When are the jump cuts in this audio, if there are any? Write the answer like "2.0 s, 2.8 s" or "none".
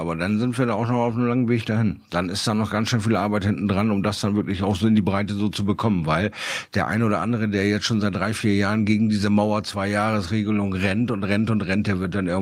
none